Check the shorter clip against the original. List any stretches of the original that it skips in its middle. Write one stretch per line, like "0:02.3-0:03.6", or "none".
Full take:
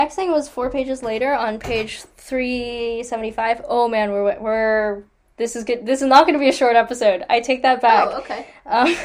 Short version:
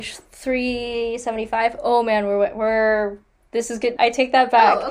0:05.8-0:07.3